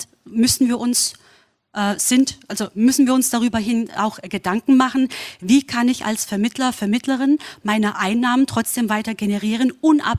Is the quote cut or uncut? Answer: uncut